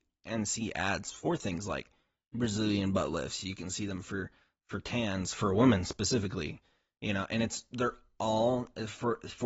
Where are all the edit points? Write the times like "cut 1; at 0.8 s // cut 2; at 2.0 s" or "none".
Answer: none